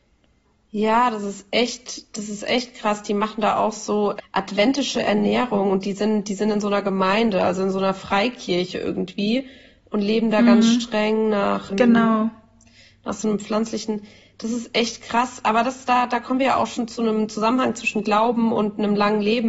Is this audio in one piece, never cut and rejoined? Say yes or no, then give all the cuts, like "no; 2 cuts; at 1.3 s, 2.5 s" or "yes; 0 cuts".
no; 2 cuts; at 4.2 s, 11.7 s